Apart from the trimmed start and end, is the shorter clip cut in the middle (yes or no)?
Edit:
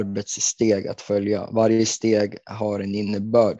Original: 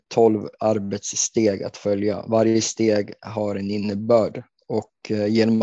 no